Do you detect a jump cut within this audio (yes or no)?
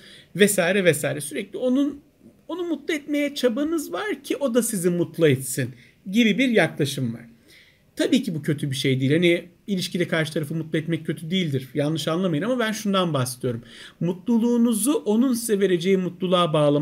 no